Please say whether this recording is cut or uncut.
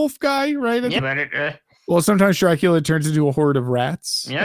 cut